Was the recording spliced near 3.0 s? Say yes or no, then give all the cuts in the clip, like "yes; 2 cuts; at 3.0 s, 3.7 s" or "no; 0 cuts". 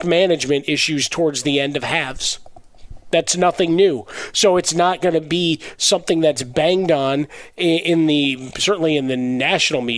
no; 0 cuts